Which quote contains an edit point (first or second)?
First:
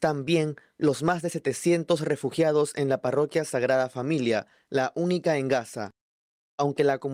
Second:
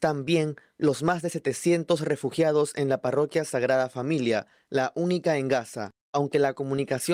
second